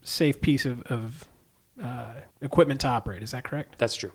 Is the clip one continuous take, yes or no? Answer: no